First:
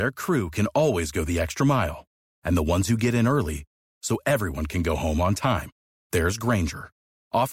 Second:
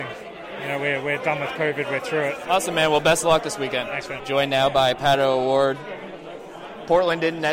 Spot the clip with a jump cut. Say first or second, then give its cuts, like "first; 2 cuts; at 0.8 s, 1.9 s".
second; 2 cuts; at 2.5 s, 4.2 s